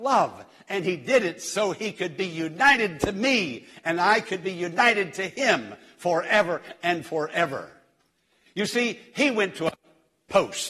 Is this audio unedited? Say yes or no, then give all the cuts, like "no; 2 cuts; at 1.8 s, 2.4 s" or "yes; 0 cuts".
no; 1 cut; at 8.5 s